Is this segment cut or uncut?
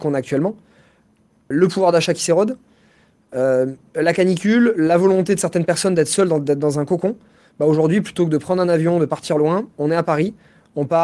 cut